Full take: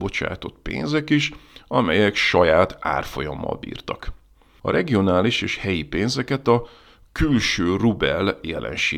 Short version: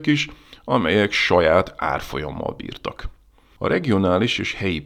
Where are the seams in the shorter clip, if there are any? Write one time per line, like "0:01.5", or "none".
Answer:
none